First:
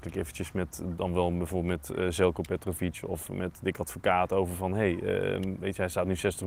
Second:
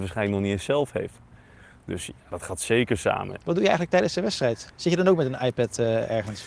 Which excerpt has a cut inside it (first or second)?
second